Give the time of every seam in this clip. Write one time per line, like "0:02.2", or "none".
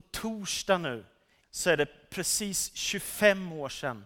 0:01.4